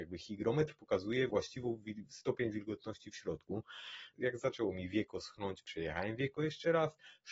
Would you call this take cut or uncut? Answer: cut